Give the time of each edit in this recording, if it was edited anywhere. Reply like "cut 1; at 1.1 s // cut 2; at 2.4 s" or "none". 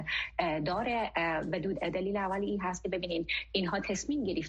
cut 1; at 1.7 s